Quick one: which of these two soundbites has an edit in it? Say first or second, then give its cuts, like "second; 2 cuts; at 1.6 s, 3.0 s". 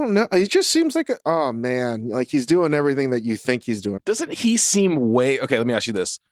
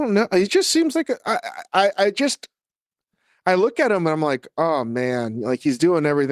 first; 2 cuts; at 1.2 s, 4.0 s